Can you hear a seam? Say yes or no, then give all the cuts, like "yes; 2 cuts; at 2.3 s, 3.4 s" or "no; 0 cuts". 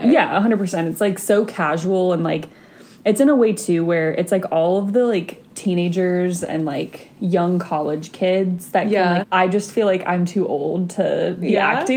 yes; 1 cut; at 9.2 s